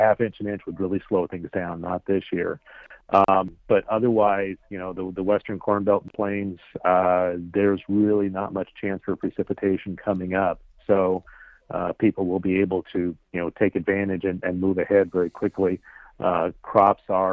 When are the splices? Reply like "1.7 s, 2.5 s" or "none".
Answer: 12.8 s